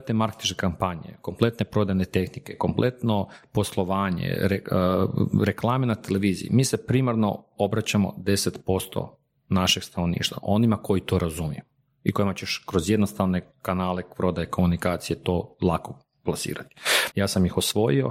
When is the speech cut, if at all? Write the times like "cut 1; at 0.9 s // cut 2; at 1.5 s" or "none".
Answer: cut 1; at 17.1 s